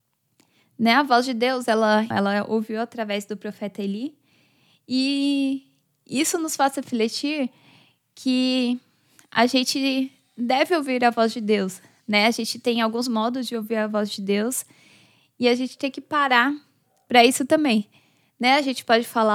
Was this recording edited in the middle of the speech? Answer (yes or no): yes